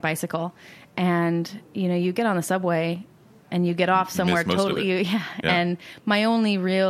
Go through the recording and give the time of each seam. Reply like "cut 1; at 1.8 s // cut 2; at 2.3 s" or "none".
none

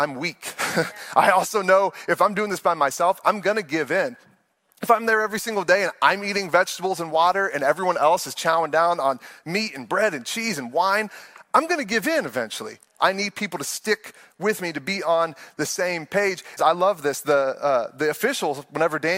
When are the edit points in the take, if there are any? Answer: cut 1; at 13.0 s // cut 2; at 16.6 s

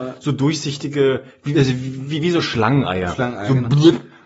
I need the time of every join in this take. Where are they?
none

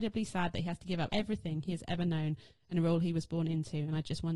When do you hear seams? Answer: cut 1; at 1.1 s

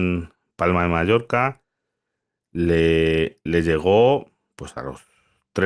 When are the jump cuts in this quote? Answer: none

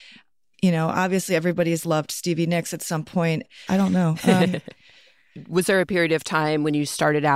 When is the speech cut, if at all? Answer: cut 1; at 3.7 s

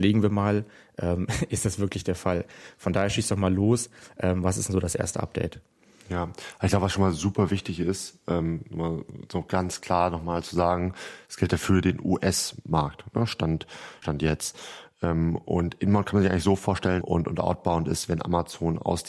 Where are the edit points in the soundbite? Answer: cut 1; at 14.0 s // cut 2; at 17.0 s

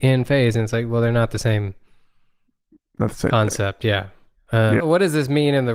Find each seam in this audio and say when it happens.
cut 1; at 4.8 s

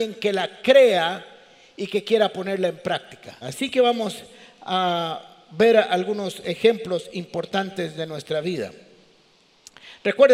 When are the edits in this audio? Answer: cut 1; at 3.4 s

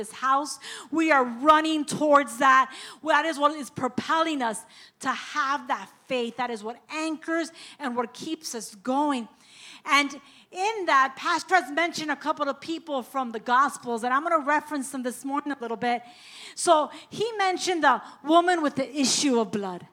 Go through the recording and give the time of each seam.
none

